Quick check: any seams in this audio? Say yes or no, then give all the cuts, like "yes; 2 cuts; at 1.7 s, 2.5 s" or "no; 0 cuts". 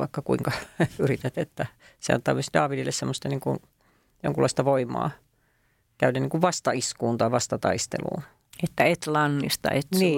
no; 0 cuts